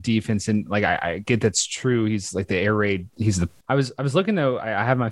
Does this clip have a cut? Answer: yes; 1 cut; at 3.6 s

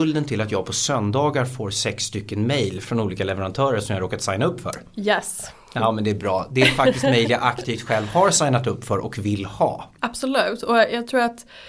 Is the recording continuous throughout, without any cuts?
no; 1 cut; at 10.0 s

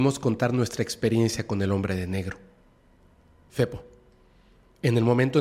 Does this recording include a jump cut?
yes; 1 cut; at 3.5 s

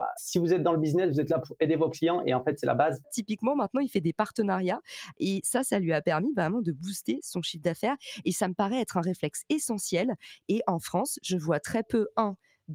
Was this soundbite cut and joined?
yes; 1 cut; at 3.0 s

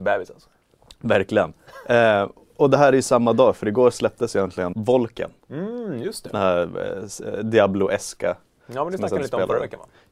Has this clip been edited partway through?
yes; 1 cut; at 4.7 s

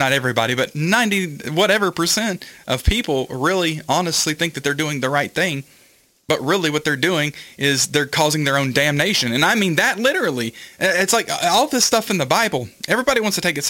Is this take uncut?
yes; 0 cuts

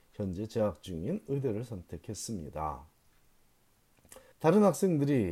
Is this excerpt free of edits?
no; 1 cut; at 4.3 s

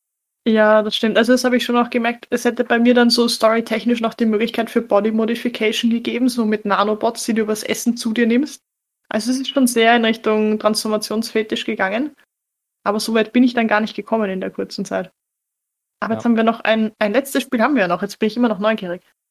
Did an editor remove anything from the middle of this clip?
no; 0 cuts

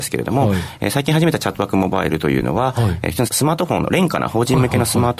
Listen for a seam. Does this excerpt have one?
yes; 1 cut; at 3.3 s

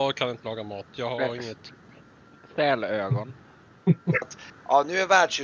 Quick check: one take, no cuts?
no; 1 cut; at 4.2 s

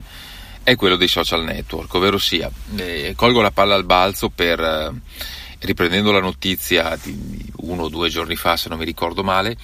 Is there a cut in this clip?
no; 0 cuts

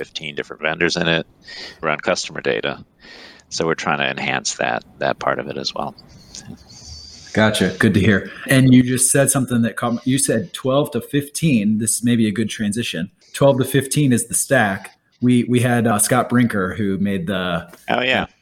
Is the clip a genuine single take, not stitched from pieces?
no; 1 cut; at 1.8 s

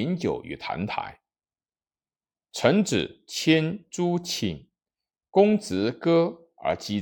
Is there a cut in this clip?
no; 0 cuts

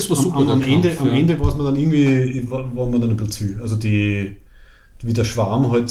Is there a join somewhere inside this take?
no; 0 cuts

